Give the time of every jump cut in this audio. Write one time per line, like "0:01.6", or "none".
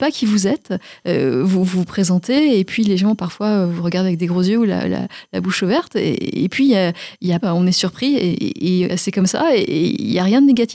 0:07.4
0:08.9